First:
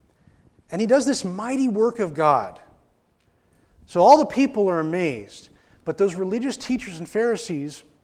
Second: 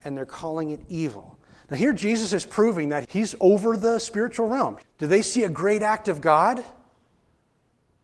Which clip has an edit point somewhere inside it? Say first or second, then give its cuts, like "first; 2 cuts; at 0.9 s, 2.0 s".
second; 2 cuts; at 3.0 s, 4.8 s